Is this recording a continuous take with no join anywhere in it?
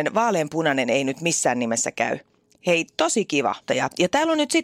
no; 1 cut; at 3.7 s

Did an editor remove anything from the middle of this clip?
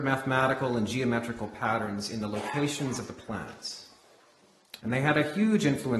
yes; 1 cut; at 4.8 s

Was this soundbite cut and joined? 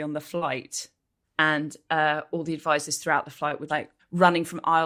yes; 2 cuts; at 1.2 s, 3.7 s

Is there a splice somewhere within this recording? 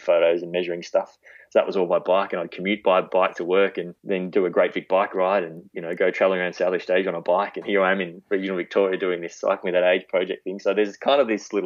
yes; 2 cuts; at 4.0 s, 7.6 s

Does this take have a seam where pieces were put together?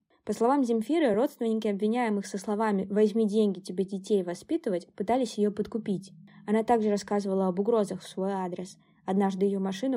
no; 0 cuts

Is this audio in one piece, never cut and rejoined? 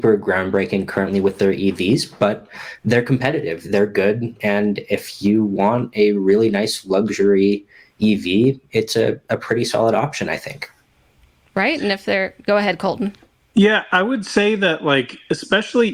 yes; 0 cuts

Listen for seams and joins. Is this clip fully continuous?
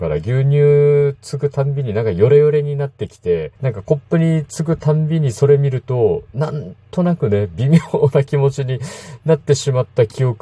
no; 1 cut; at 3.5 s

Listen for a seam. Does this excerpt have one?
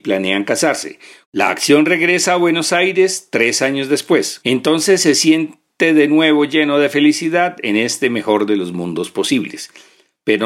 yes; 2 cuts; at 1.2 s, 4.4 s

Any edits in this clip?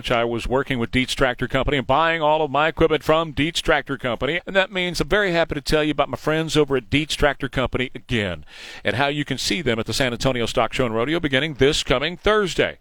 yes; 1 cut; at 4.4 s

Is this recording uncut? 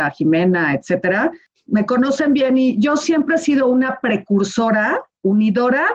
yes; 0 cuts

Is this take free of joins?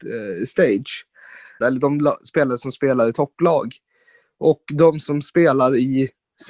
no; 1 cut; at 1.6 s

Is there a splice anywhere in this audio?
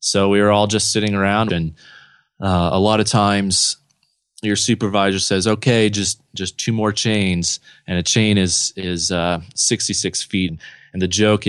yes; 2 cuts; at 1.5 s, 10.5 s

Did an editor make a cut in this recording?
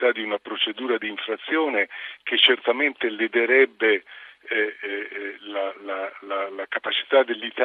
no; 0 cuts

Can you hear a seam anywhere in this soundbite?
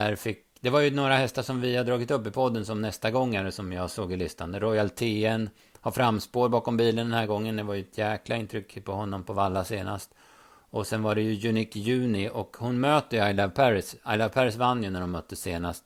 no; 0 cuts

